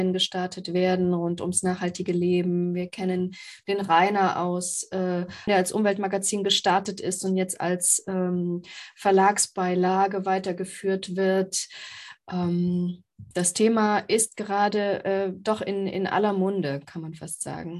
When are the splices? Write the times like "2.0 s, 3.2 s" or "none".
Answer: 5.5 s, 13.3 s